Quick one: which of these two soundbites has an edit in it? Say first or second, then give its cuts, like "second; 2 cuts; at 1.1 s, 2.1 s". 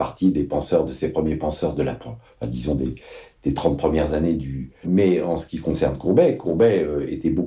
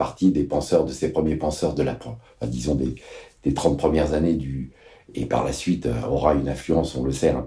first; 1 cut; at 4.8 s